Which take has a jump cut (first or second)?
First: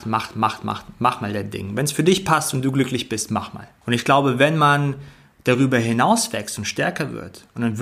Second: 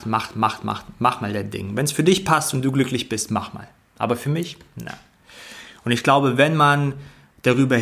first